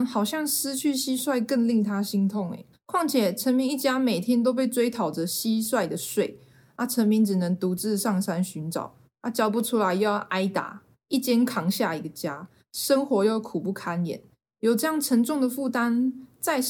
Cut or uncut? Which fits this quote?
cut